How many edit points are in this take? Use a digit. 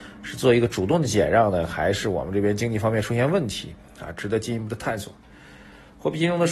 0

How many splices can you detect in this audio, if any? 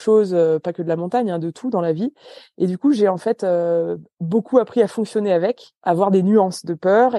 0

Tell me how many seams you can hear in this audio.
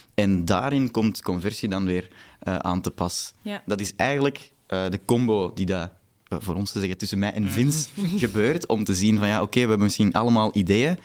0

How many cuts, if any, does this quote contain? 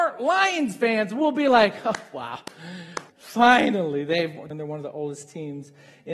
2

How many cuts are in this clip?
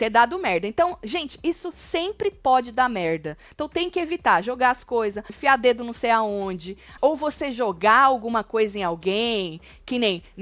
2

